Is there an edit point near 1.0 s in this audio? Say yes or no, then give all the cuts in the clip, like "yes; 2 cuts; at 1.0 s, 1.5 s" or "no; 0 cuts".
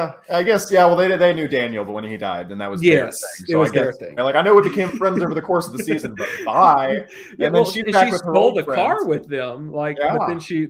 no; 1 cut; at 4.2 s